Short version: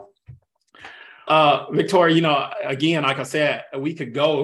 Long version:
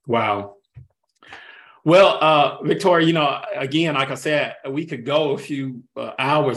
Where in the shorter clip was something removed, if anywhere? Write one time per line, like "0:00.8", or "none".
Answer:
0:01.3